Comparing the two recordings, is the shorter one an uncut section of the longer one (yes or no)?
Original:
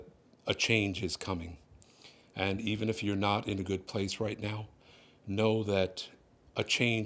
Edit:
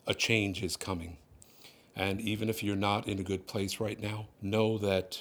no